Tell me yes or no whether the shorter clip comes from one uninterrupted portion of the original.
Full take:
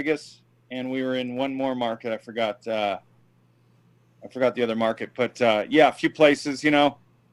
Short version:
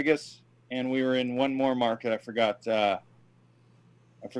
yes